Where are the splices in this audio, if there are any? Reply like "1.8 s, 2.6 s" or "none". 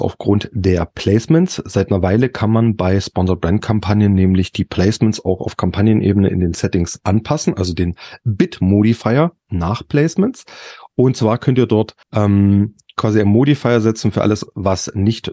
12.0 s